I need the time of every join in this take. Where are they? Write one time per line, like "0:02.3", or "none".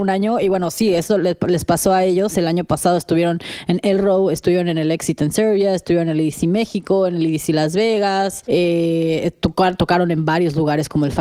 none